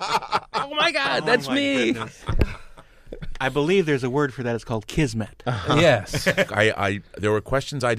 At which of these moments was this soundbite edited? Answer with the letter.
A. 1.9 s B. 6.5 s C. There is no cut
B